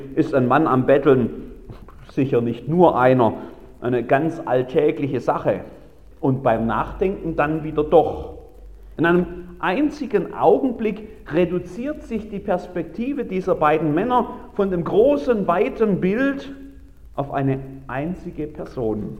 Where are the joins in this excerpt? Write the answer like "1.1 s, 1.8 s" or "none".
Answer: 6.1 s, 9.0 s